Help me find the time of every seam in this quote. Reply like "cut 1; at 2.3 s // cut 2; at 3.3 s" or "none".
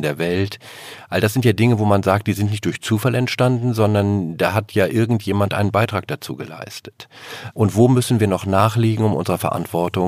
cut 1; at 7.5 s